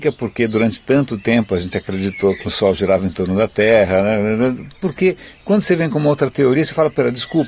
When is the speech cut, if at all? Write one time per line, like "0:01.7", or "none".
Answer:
0:02.4